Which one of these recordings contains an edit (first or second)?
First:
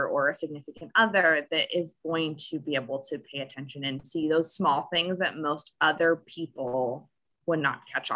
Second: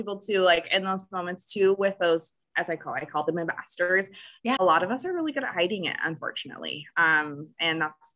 second